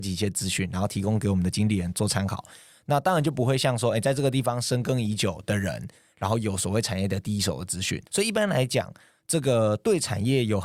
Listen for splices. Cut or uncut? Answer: cut